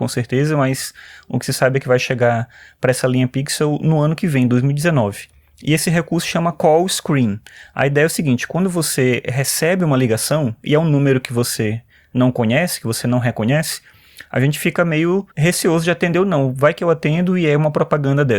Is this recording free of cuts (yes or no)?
no